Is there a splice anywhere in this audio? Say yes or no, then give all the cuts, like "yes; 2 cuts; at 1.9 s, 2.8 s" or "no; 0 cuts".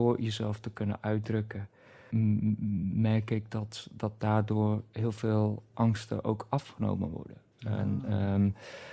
yes; 2 cuts; at 2.1 s, 5.7 s